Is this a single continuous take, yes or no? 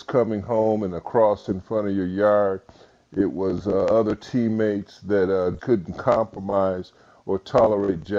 no